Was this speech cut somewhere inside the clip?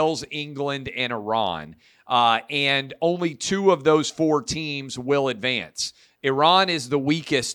no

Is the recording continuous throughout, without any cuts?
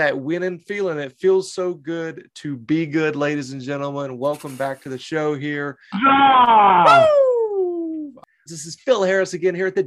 no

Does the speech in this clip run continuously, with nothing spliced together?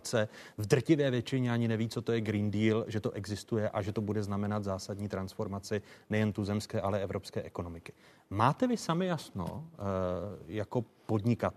yes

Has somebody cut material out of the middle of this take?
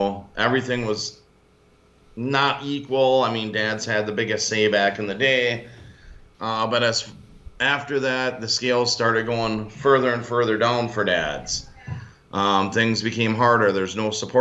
yes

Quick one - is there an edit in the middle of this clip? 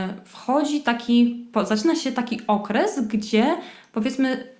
no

